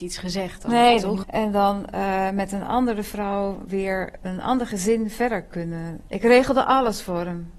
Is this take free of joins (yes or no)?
no